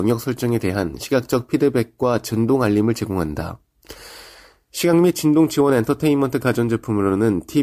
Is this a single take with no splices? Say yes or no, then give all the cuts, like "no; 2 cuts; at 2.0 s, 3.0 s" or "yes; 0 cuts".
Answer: yes; 0 cuts